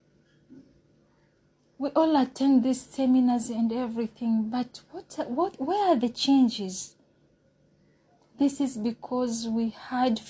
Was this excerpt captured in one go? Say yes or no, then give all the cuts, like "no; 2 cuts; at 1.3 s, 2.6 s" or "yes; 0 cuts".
yes; 0 cuts